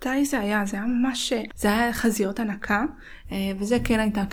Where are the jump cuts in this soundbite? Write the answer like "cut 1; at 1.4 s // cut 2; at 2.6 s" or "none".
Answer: cut 1; at 1.5 s // cut 2; at 3.2 s